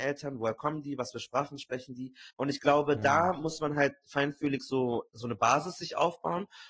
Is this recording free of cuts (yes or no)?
no